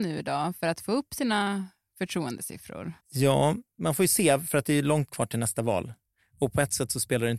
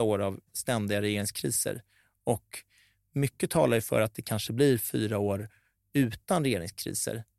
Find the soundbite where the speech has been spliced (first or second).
first